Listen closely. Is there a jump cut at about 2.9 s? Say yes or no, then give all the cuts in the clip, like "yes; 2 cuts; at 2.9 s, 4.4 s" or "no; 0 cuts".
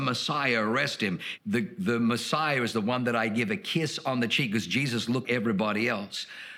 no; 2 cuts; at 1.4 s, 5.2 s